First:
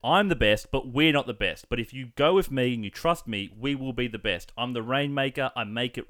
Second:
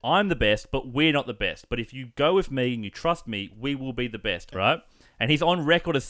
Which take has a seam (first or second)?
second